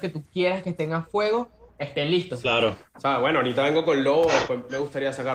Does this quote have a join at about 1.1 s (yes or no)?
no